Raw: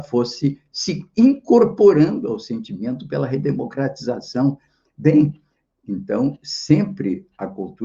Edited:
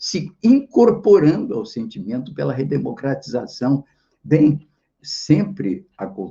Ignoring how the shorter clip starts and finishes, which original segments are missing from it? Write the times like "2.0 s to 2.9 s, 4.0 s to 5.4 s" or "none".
5.7 s to 6.4 s